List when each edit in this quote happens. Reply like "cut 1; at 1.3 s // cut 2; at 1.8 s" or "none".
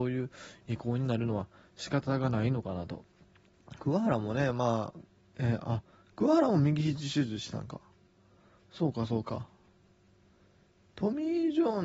cut 1; at 5.2 s